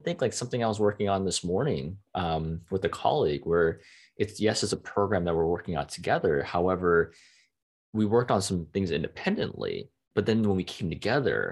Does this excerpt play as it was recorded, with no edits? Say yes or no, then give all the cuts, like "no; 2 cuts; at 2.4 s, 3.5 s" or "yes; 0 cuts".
yes; 0 cuts